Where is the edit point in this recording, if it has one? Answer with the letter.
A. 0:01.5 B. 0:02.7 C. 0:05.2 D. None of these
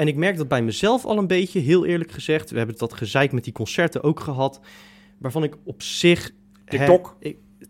B